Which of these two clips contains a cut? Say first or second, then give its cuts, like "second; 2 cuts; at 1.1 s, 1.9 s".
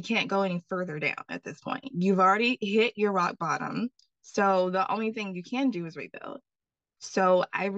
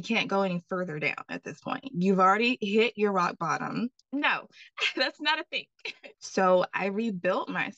second; 2 cuts; at 4.0 s, 6.1 s